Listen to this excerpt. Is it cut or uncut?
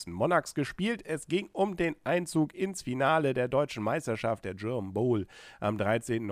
uncut